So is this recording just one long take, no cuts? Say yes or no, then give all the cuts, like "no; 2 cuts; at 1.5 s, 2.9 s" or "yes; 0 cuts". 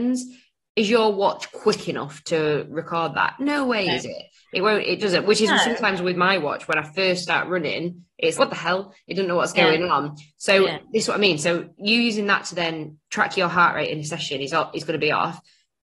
no; 1 cut; at 8.4 s